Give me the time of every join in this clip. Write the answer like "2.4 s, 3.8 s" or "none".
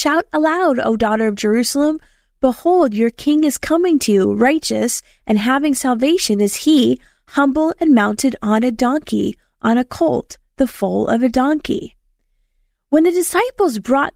none

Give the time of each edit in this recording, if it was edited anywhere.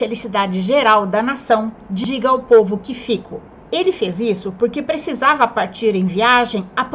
3.6 s

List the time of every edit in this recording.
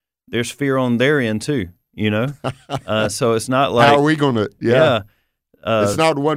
none

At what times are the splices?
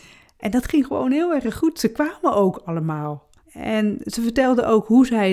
3.4 s

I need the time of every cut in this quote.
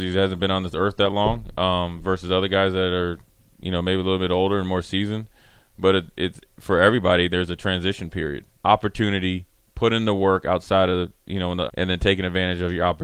8.5 s, 11.7 s

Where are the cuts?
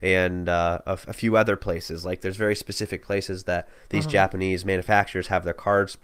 none

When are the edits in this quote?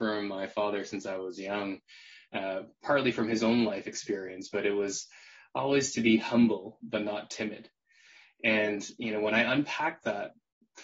none

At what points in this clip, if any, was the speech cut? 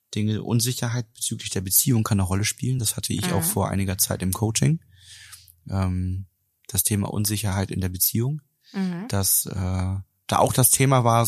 none

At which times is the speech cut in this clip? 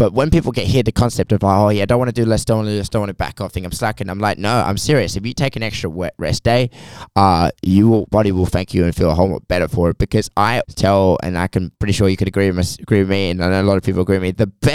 10.6 s, 11.8 s

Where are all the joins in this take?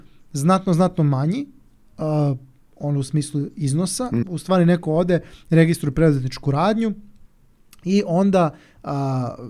4.2 s

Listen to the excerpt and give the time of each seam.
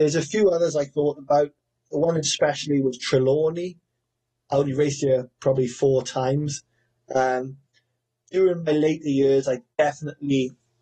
7.0 s

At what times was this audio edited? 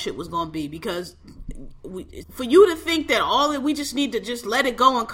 2.2 s

